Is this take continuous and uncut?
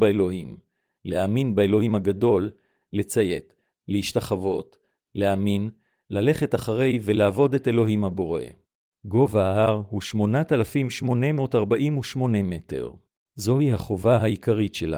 no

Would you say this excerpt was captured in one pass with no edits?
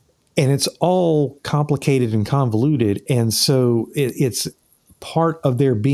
yes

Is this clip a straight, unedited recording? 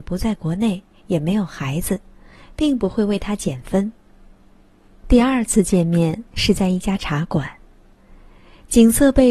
yes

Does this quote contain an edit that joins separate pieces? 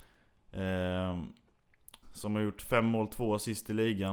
yes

